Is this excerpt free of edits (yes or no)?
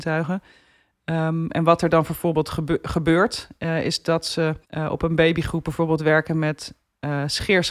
no